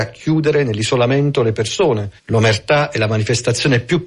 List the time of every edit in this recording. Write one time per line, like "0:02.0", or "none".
0:02.2